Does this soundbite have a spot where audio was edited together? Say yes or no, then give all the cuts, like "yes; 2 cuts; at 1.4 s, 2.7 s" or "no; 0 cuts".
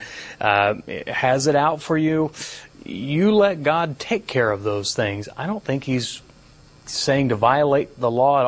no; 0 cuts